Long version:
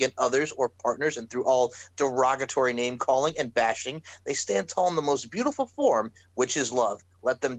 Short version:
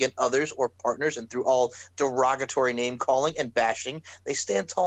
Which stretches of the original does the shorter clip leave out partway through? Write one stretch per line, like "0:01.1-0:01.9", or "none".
none